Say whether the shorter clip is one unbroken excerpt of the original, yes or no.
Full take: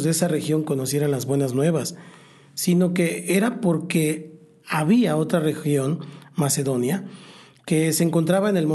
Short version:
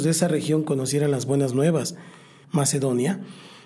no